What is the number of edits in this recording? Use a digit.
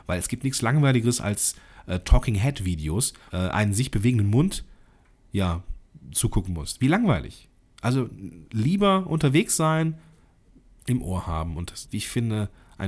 3